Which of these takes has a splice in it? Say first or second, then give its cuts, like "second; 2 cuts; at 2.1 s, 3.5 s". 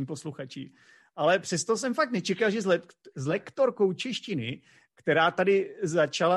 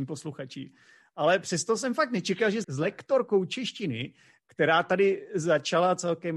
second; 1 cut; at 2.6 s